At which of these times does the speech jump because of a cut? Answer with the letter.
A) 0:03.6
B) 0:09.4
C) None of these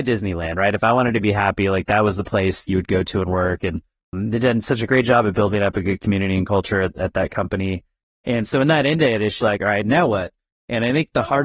B